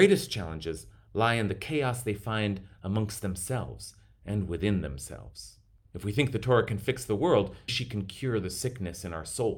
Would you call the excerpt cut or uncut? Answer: cut